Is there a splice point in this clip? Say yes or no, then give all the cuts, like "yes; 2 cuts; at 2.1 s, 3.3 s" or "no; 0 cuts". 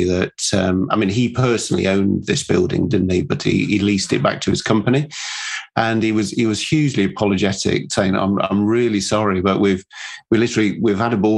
no; 0 cuts